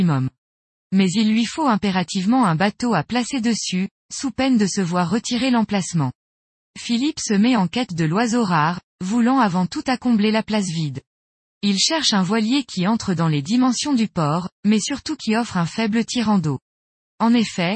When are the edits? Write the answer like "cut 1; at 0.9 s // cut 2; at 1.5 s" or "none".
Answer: cut 1; at 14.5 s